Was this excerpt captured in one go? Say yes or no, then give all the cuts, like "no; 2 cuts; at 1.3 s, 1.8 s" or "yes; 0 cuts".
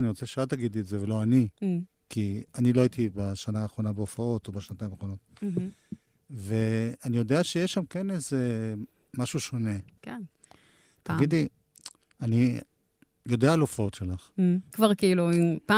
no; 2 cuts; at 10.0 s, 14.7 s